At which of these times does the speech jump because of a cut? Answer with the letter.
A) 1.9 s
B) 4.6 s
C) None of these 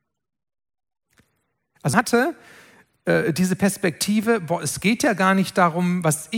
A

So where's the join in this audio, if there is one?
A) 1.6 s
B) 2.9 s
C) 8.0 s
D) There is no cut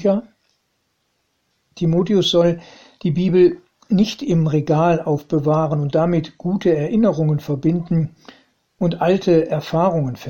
A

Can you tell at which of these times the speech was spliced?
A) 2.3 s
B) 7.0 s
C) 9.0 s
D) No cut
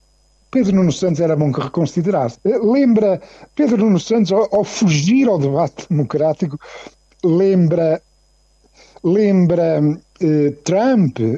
A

